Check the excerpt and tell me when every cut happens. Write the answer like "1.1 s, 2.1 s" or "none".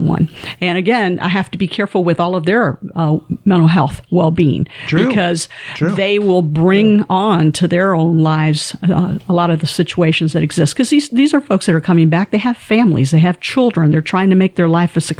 none